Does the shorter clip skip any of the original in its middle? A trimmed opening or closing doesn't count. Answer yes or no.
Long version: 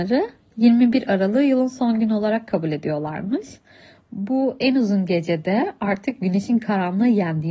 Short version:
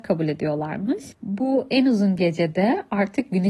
yes